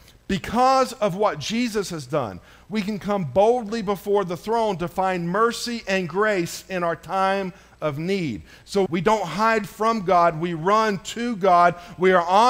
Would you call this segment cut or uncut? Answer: cut